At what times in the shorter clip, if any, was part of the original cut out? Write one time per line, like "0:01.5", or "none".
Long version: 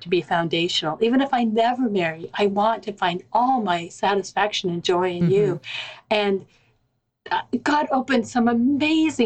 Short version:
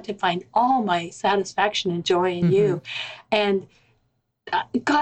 none